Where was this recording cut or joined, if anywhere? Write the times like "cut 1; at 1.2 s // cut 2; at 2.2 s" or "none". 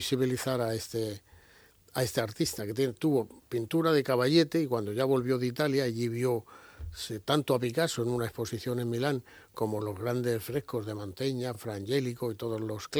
none